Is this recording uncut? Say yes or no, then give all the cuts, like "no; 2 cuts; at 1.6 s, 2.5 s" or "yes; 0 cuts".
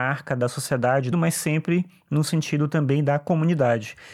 no; 1 cut; at 1.1 s